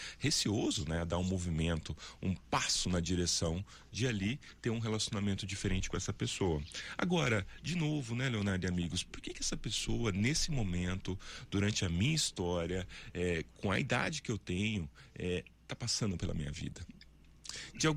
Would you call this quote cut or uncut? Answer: uncut